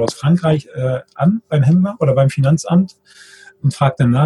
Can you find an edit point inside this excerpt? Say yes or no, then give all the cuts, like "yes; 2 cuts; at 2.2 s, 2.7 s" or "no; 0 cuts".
no; 0 cuts